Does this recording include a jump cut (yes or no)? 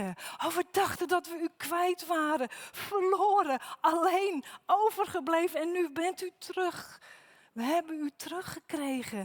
no